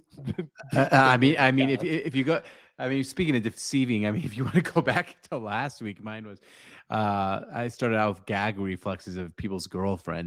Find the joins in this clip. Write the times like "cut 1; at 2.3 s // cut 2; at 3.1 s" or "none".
none